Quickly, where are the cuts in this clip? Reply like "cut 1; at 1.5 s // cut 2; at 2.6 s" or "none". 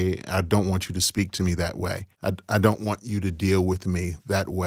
cut 1; at 2.1 s